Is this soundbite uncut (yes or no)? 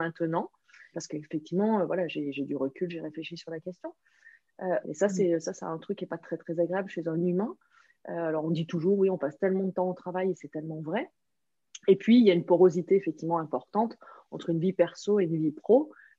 no